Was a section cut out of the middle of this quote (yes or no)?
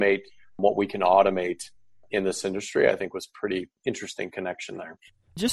no